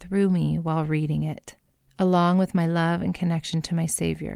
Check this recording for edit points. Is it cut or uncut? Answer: uncut